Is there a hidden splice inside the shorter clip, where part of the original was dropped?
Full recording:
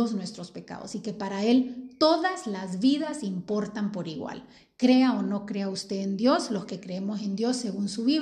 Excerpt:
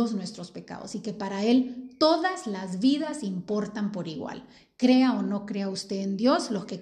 no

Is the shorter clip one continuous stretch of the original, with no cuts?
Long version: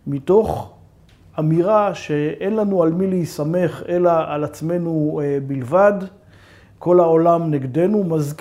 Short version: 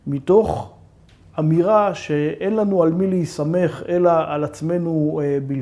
yes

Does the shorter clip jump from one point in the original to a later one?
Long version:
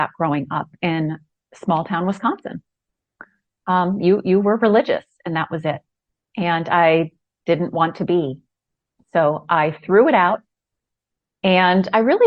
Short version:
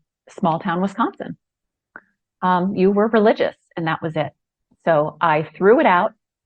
yes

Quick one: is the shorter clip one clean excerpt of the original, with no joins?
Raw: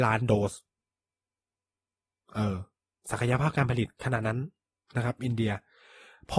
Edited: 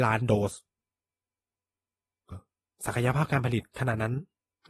no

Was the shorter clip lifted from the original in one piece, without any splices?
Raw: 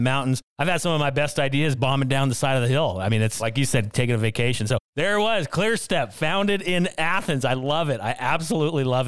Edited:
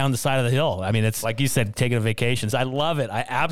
no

